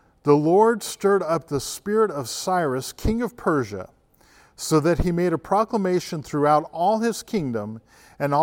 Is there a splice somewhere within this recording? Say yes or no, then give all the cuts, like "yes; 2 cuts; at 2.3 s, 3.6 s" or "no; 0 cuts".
no; 0 cuts